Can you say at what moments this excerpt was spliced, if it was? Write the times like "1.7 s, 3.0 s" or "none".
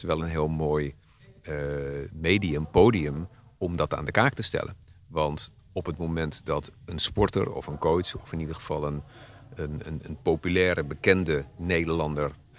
9.8 s